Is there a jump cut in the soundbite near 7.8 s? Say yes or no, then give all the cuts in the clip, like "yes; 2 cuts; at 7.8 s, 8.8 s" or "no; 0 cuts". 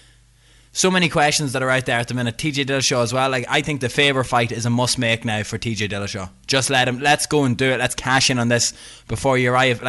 no; 0 cuts